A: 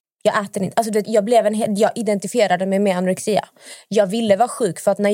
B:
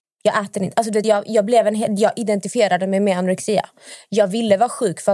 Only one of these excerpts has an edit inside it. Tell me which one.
A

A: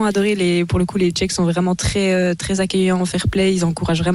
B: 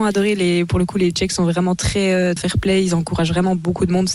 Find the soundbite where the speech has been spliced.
B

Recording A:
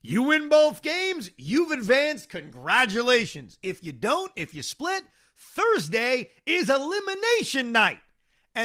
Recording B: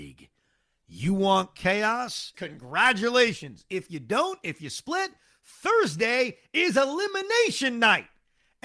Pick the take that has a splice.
B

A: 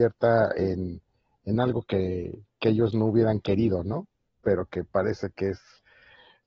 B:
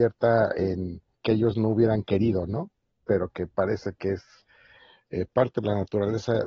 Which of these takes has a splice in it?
B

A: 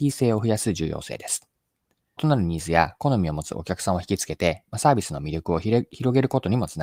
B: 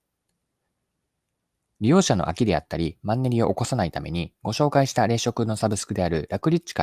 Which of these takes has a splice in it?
A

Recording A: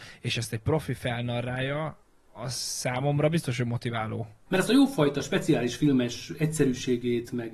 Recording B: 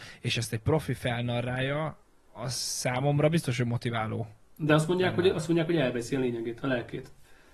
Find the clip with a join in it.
A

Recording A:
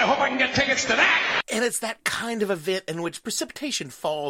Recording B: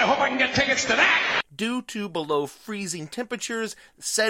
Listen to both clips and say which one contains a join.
B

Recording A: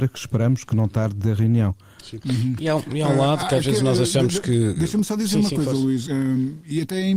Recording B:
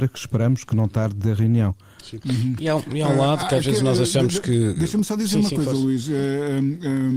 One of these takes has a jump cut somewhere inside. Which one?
A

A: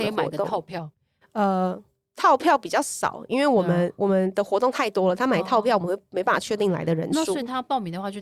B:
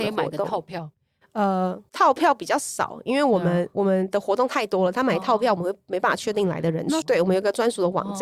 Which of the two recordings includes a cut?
B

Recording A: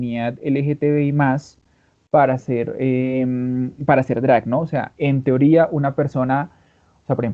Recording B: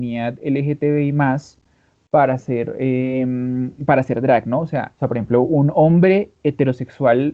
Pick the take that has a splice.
B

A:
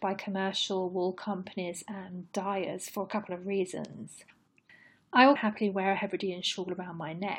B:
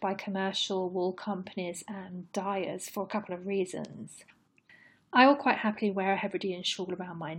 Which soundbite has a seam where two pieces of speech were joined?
A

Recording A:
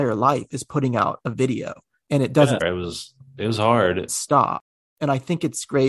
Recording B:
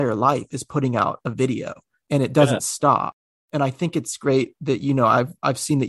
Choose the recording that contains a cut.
A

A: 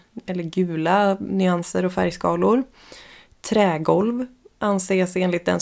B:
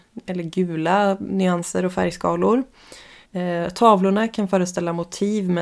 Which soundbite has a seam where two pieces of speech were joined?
B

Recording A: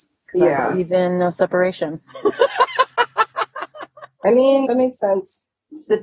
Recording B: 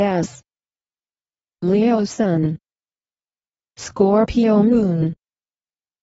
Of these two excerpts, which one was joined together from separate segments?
A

